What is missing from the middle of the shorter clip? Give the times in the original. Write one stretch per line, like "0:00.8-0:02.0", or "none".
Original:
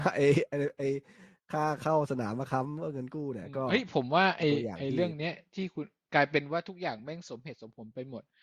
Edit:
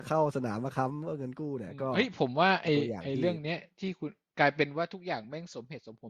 none

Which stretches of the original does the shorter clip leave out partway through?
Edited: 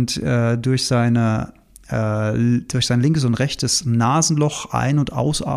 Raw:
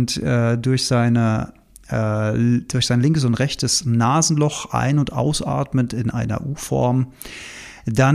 none

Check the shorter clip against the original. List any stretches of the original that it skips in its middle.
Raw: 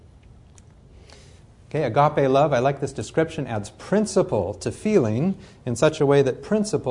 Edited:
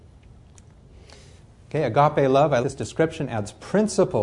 0:02.6-0:02.8

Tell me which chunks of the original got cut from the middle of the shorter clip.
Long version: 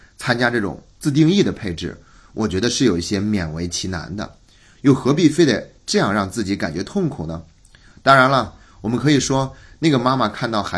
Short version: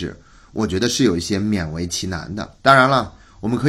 0:04.4-0:08.0

